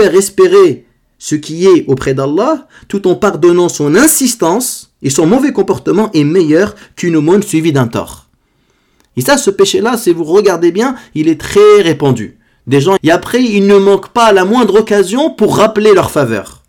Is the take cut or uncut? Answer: cut